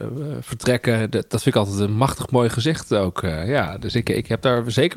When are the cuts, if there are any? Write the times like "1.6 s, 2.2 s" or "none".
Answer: none